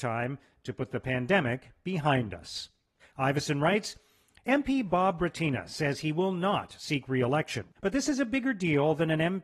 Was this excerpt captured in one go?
no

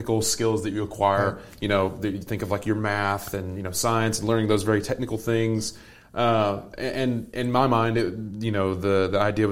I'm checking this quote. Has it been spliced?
no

